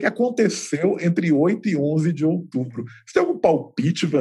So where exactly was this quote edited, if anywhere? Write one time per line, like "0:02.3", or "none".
none